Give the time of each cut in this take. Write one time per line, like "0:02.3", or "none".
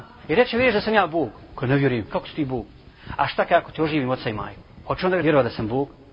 none